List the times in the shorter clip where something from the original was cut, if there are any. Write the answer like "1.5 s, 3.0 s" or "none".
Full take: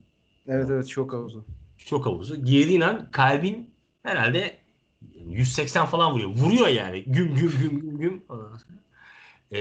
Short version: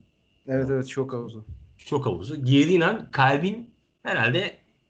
none